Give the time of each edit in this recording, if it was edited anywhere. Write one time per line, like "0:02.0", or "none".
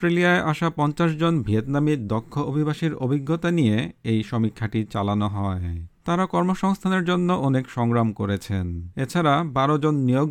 0:06.0
0:08.9

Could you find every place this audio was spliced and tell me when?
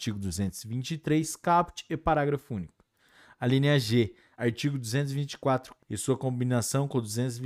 0:04.3
0:05.8

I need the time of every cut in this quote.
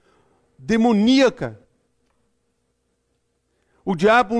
none

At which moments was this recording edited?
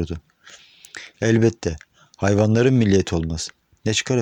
0:01.1

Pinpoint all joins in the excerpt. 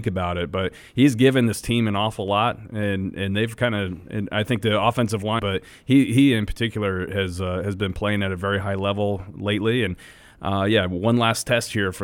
0:05.4

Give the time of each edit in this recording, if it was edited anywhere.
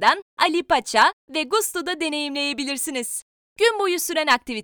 0:03.5

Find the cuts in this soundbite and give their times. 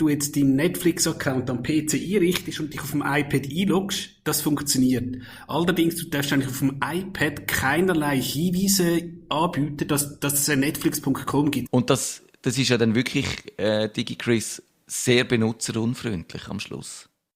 0:11.7

